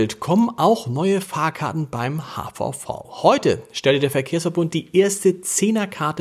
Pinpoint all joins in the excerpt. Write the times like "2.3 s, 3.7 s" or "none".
none